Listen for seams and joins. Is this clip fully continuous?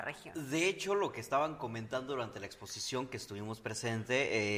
yes; 0 cuts

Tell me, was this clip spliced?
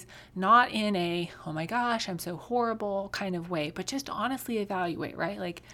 no; 0 cuts

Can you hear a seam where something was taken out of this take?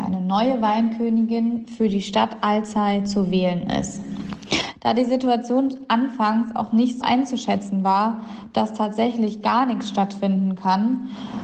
yes; 1 cut; at 7.0 s

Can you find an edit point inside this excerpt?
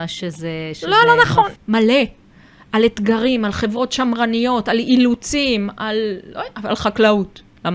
yes; 1 cut; at 1.6 s

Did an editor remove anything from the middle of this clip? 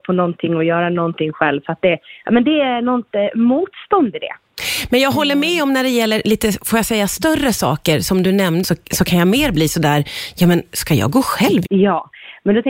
yes; 2 cuts; at 8.6 s, 11.7 s

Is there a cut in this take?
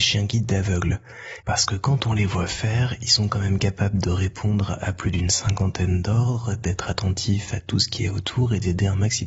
yes; 1 cut; at 1.4 s

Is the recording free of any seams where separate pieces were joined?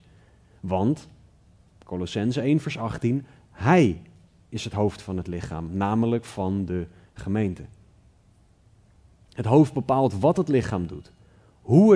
yes; 0 cuts

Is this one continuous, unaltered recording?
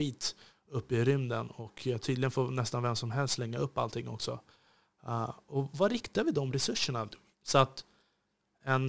no; 1 cut; at 7.3 s

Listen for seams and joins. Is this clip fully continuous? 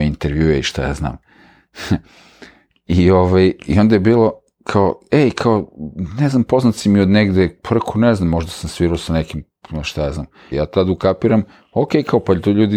no; 1 cut; at 10.5 s

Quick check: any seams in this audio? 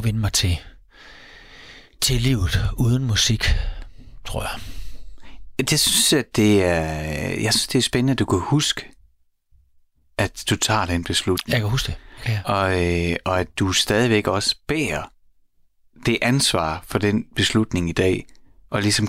no; 0 cuts

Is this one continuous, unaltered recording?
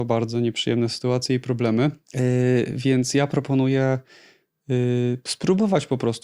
no; 1 cut; at 2.0 s

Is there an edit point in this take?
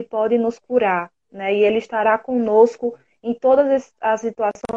no; 0 cuts

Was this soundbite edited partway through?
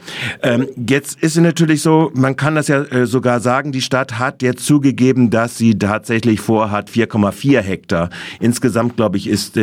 no; 0 cuts

